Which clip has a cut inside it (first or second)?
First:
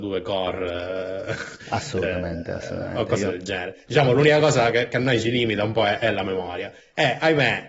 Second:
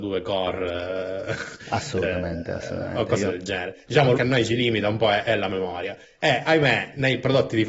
second